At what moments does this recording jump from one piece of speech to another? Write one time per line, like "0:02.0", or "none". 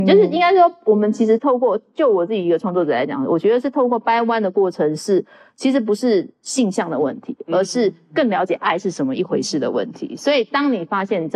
none

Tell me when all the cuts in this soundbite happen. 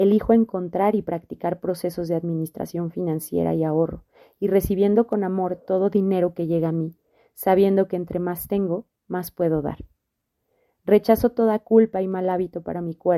none

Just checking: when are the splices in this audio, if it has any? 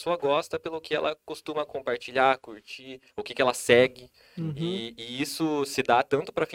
0:03.1

